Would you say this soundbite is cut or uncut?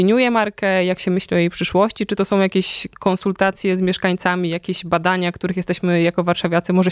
uncut